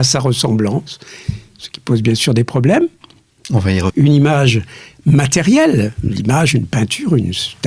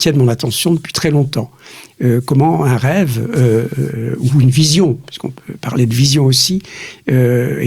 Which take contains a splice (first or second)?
first